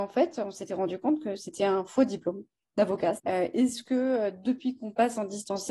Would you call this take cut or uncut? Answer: cut